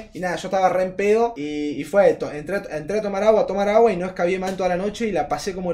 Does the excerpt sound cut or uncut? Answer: uncut